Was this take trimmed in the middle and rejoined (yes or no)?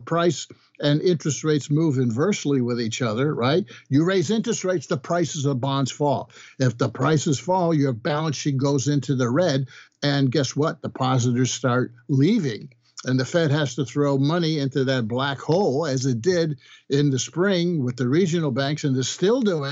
no